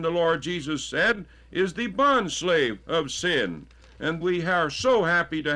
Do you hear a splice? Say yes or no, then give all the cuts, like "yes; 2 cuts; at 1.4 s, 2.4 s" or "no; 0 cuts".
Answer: yes; 1 cut; at 4.2 s